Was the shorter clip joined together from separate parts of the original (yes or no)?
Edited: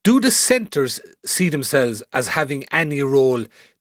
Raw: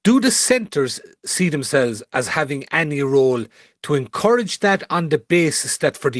no